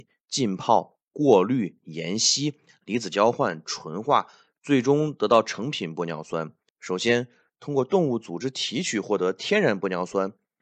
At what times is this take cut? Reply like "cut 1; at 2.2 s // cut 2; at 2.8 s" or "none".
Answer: cut 1; at 6.7 s